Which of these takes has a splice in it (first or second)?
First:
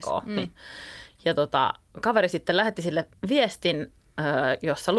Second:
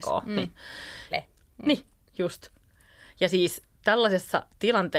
second